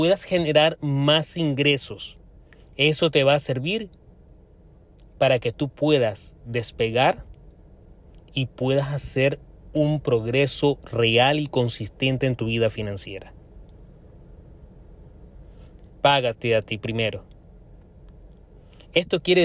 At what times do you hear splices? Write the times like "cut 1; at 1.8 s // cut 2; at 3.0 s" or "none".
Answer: cut 1; at 15.9 s